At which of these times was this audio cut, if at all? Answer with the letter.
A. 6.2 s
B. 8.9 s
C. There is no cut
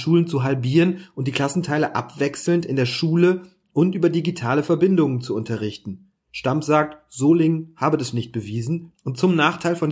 B